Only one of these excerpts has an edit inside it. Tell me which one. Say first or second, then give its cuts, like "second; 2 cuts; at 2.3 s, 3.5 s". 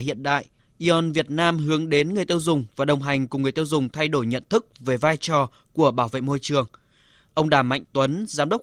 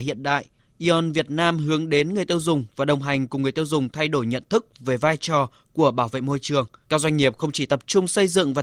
second; 1 cut; at 6.8 s